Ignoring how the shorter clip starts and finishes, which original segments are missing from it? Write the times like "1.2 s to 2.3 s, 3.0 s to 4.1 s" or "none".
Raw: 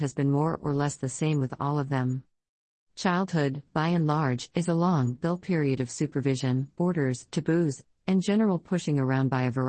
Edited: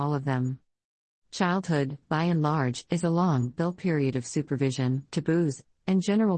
6.7 s to 7.3 s